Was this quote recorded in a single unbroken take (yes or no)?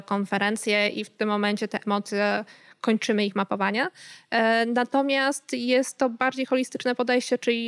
yes